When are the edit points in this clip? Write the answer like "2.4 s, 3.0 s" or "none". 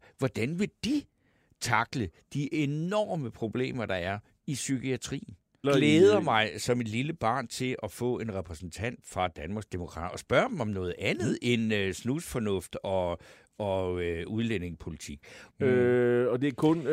5.6 s, 15.5 s